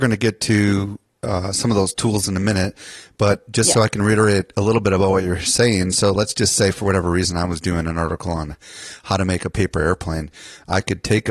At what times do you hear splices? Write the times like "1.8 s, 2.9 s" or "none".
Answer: none

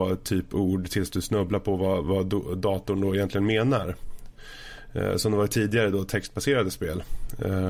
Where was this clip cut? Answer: none

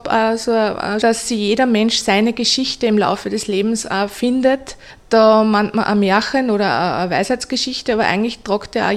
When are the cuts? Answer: 1.0 s

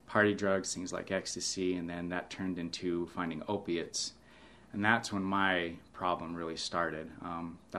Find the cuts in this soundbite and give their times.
none

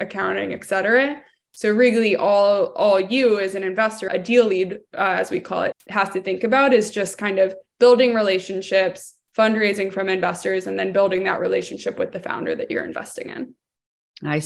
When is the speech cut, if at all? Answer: 4.1 s, 5.7 s

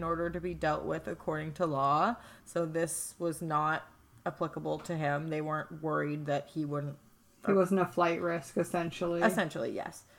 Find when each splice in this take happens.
none

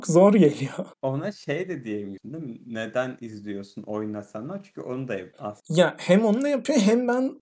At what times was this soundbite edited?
none

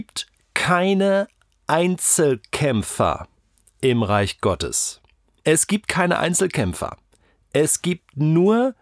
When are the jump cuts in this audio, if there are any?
5.4 s

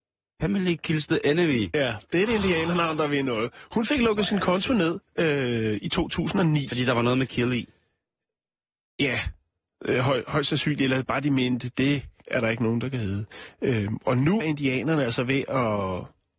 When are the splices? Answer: 14.4 s

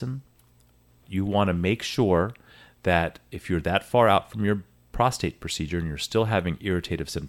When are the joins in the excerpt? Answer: 1.0 s

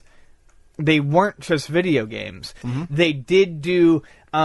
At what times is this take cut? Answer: 2.6 s

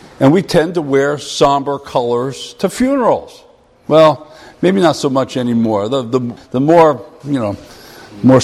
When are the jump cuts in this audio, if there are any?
6.4 s

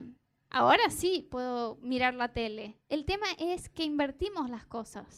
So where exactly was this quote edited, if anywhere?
2.9 s

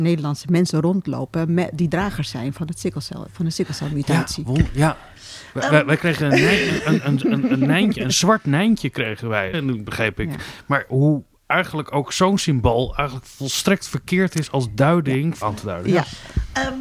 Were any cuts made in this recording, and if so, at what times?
9.5 s, 15.4 s

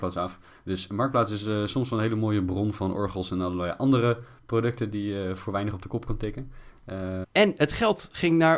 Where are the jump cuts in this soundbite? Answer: 7.2 s

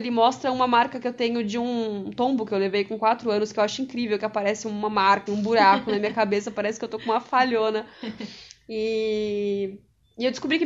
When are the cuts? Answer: 5.3 s

